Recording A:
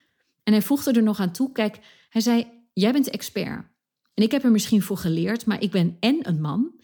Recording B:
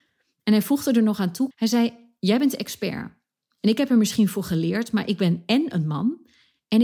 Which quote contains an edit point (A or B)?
B